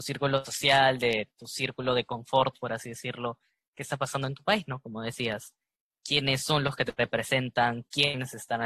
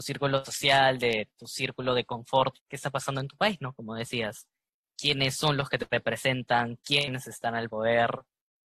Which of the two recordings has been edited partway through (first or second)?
second